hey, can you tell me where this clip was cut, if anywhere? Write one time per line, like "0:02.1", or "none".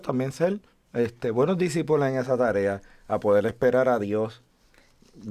none